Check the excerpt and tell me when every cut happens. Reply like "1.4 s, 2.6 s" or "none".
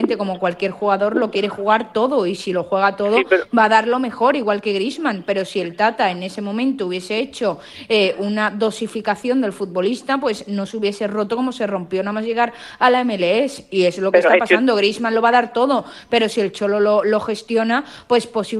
none